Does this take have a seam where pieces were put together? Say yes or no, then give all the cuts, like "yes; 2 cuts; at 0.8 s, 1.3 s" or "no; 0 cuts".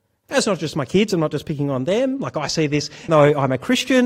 yes; 1 cut; at 3.1 s